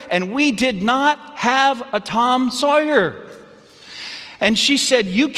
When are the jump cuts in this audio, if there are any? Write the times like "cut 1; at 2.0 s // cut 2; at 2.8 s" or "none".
none